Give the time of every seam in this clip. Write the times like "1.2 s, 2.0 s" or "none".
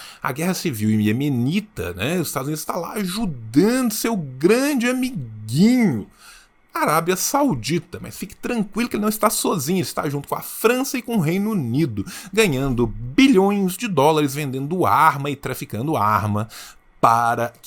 none